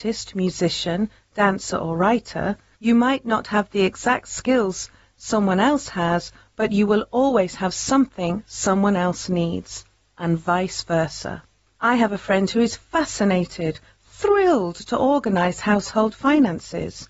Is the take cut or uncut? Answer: cut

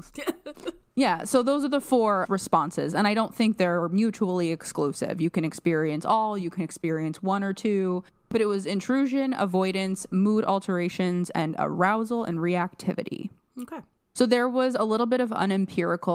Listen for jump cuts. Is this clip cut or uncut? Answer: uncut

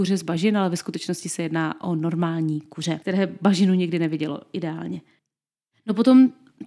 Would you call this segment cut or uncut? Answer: uncut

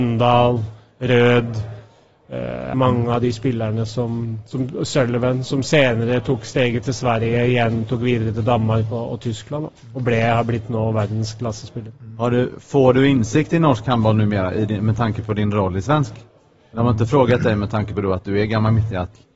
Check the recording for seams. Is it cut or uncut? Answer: cut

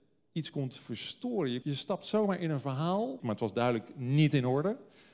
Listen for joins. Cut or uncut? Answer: cut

